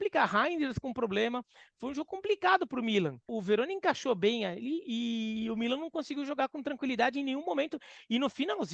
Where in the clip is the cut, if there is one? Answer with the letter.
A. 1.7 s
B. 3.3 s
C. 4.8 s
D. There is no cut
B